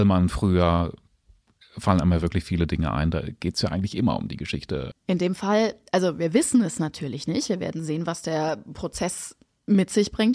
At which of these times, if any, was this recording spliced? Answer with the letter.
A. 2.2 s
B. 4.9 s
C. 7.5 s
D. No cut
B